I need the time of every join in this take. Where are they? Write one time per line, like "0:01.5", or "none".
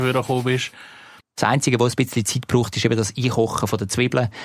0:01.2